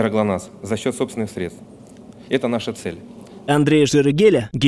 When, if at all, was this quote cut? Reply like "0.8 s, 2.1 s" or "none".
2.3 s, 3.5 s